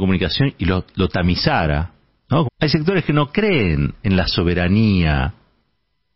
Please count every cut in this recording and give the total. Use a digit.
1